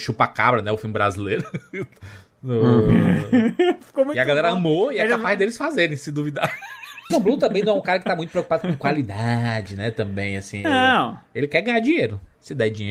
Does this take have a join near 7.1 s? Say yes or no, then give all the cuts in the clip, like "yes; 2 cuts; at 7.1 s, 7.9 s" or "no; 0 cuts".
yes; 1 cut; at 7.1 s